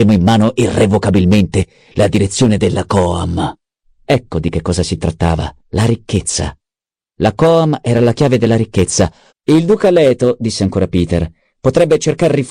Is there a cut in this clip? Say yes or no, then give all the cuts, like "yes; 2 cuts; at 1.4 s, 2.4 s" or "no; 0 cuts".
yes; 3 cuts; at 3.8 s, 5.6 s, 9.3 s